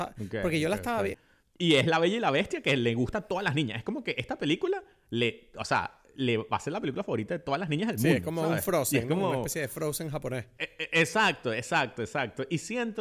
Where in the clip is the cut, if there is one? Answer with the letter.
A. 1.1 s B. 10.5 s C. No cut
A